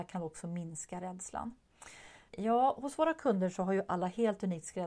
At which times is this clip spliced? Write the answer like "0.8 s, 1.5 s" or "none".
2.3 s